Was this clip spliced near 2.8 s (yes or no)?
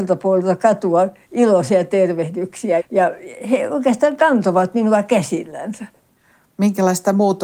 yes